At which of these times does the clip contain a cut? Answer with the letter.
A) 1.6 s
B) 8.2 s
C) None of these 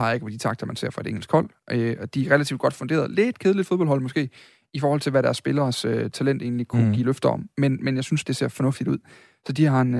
B